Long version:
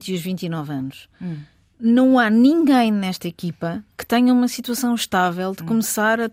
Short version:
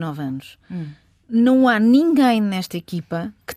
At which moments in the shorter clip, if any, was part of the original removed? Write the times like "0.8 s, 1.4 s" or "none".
none